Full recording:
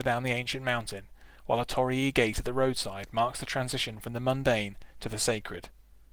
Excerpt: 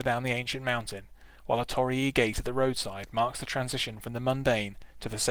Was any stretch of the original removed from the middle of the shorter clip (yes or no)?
no